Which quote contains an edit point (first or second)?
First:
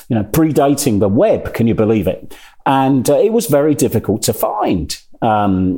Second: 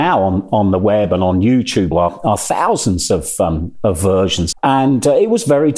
second